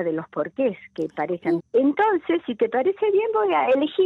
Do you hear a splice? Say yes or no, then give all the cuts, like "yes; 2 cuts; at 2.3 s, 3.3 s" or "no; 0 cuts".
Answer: yes; 1 cut; at 1.6 s